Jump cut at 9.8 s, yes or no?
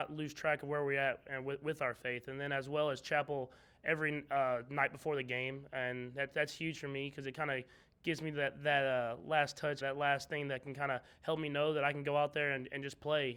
yes